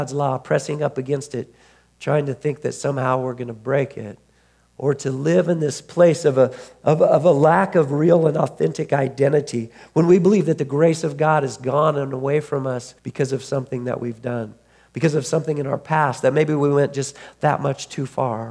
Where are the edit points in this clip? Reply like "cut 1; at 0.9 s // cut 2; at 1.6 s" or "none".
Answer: cut 1; at 13.0 s